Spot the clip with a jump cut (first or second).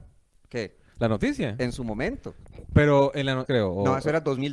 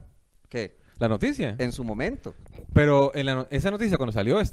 first